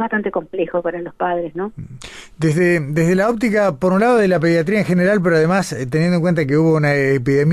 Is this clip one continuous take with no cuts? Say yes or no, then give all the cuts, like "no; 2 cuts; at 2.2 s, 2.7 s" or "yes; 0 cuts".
yes; 0 cuts